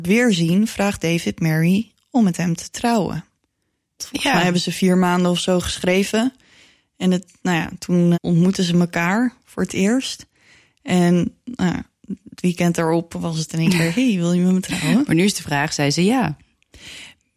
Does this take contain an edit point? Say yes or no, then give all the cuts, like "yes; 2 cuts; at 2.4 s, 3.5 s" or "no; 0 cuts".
yes; 2 cuts; at 4.0 s, 8.1 s